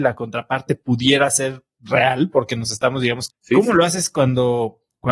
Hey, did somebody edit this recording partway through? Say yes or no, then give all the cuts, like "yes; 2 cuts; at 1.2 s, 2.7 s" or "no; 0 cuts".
yes; 1 cut; at 3.3 s